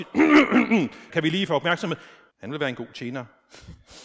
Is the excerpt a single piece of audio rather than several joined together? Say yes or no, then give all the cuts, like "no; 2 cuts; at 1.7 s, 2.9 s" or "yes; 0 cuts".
no; 2 cuts; at 1.1 s, 2.3 s